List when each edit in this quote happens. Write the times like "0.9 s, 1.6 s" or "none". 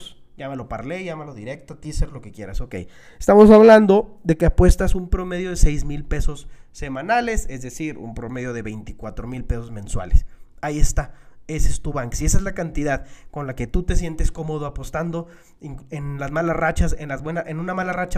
none